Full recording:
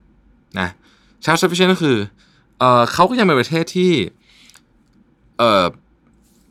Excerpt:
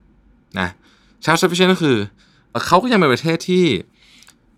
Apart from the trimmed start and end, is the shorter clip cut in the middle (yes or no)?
yes